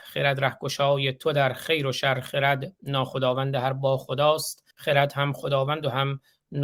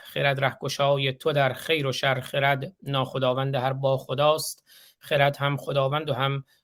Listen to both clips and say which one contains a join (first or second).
first